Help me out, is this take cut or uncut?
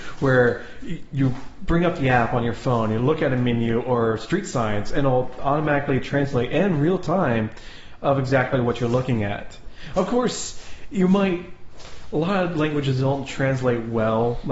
uncut